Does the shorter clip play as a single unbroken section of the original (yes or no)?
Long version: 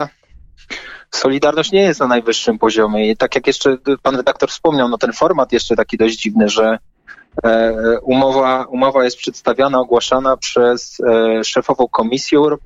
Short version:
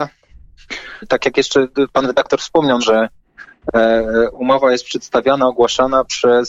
no